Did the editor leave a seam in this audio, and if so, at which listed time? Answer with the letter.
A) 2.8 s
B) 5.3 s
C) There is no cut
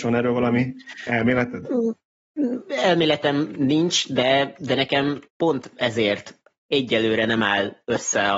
B